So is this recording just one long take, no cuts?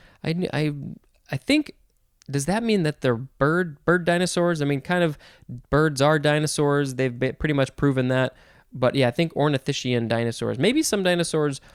yes; 0 cuts

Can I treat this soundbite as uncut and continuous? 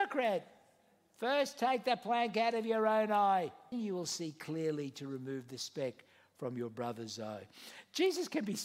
no; 1 cut; at 3.7 s

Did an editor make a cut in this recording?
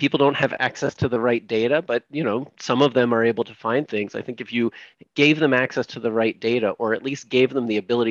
no; 0 cuts

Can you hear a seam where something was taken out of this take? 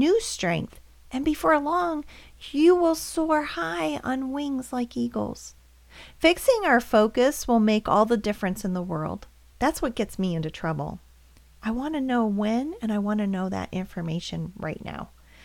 yes; 1 cut; at 9.5 s

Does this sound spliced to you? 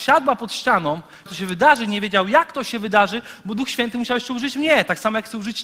yes; 1 cut; at 1.3 s

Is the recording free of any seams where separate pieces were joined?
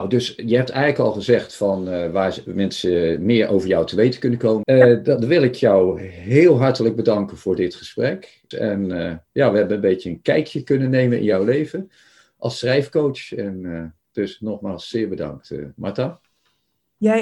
no; 2 cuts; at 4.6 s, 8.5 s

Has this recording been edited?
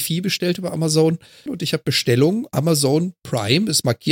yes; 1 cut; at 1.5 s

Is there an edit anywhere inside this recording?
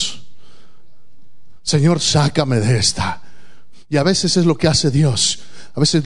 no; 0 cuts

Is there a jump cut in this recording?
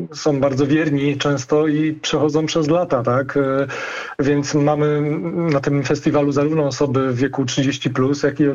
no; 0 cuts

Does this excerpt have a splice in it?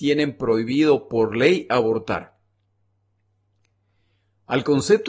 no; 0 cuts

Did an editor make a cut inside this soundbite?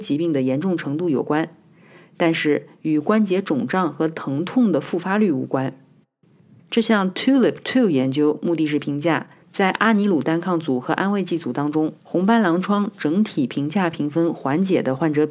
yes; 3 cuts; at 6.6 s, 9.4 s, 12.0 s

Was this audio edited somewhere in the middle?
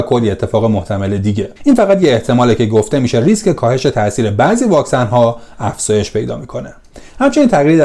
yes; 1 cut; at 1.6 s

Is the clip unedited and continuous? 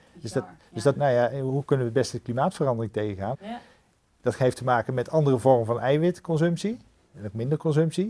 no; 2 cuts; at 0.9 s, 3.3 s

